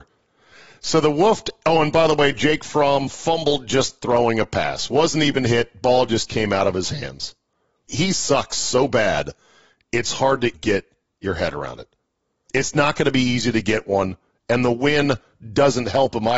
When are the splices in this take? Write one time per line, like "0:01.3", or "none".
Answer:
0:07.9
0:10.5
0:12.5